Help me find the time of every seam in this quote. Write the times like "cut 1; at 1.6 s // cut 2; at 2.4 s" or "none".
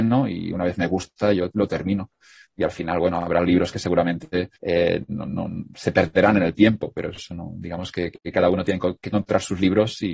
cut 1; at 4.6 s